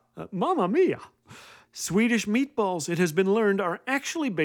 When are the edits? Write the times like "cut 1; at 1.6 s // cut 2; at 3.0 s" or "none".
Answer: cut 1; at 1.6 s